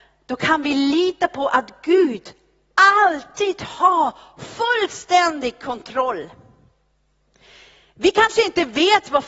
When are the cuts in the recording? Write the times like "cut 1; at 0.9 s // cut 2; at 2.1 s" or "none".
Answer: none